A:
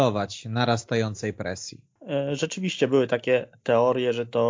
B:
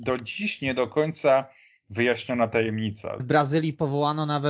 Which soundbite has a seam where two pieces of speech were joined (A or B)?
B